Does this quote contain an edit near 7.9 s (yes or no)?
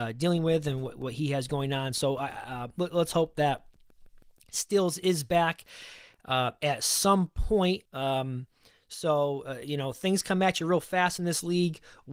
yes